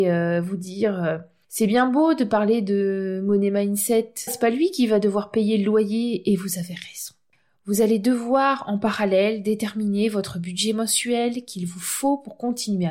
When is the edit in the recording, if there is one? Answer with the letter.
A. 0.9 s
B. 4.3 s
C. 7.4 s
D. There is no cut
B